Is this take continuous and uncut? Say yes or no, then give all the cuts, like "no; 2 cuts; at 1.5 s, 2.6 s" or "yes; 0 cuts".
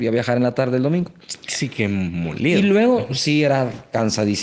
yes; 0 cuts